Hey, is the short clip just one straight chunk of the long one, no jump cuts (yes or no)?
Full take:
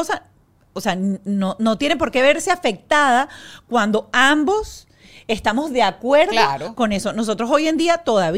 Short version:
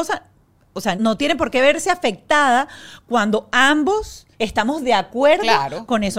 no